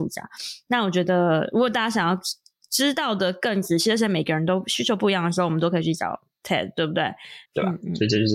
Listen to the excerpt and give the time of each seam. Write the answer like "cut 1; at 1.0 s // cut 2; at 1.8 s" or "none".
cut 1; at 7.5 s